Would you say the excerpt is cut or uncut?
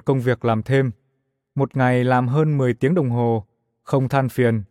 uncut